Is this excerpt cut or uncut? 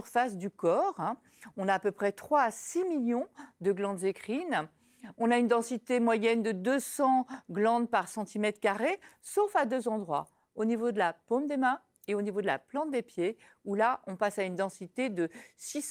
uncut